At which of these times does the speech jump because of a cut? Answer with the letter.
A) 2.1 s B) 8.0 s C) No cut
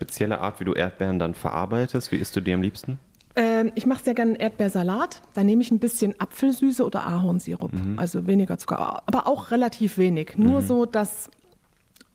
C